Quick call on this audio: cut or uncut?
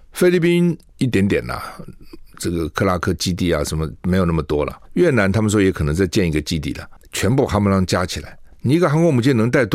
cut